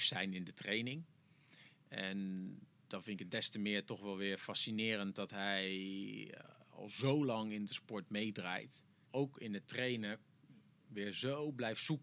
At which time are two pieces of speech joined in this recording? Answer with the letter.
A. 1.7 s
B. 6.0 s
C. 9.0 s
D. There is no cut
C